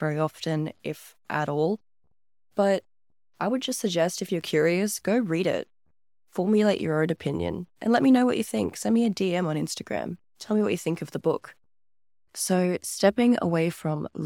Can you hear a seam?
no; 0 cuts

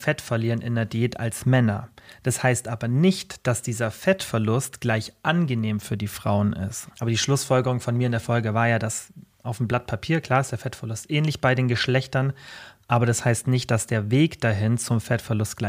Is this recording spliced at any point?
yes; 1 cut; at 6.9 s

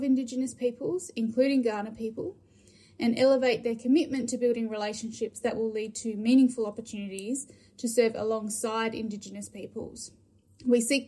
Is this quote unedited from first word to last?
yes; 0 cuts

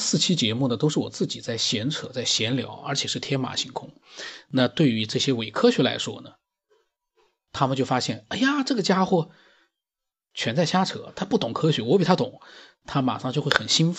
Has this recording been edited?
no; 0 cuts

